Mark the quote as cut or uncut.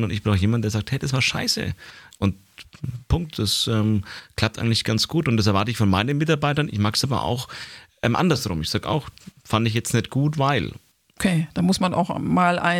cut